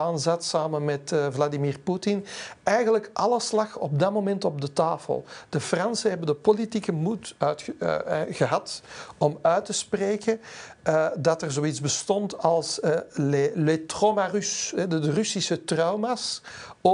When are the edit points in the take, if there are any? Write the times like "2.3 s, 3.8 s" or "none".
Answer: none